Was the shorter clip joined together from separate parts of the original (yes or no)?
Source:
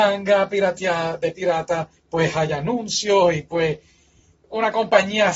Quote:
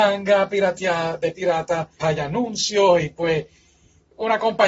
yes